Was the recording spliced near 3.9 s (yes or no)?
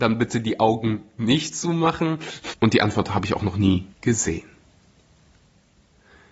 yes